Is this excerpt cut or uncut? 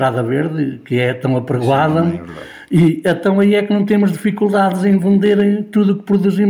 uncut